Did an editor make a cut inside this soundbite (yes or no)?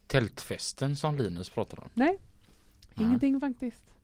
no